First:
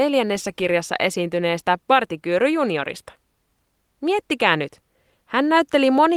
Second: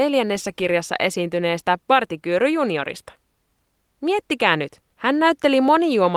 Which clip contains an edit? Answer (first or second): second